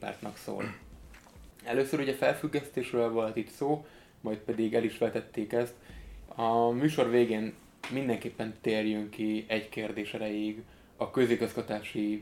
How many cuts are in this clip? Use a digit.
2